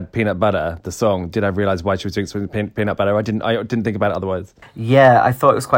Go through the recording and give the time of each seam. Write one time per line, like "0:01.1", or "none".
none